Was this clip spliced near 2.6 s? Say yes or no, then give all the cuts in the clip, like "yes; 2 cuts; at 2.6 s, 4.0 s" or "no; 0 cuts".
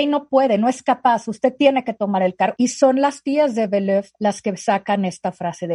yes; 1 cut; at 2.6 s